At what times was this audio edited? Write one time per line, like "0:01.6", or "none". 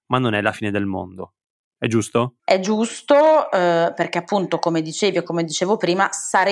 0:02.4